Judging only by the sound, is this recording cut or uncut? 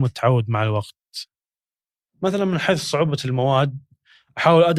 uncut